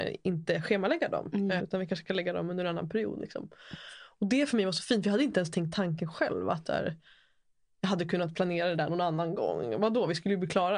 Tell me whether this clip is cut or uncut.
cut